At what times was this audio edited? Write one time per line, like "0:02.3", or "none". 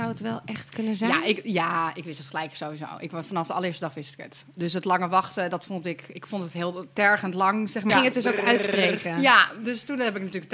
0:07.9